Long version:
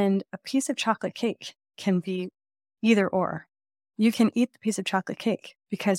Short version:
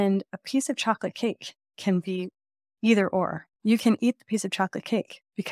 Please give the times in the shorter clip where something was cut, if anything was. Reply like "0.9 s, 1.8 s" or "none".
3.5 s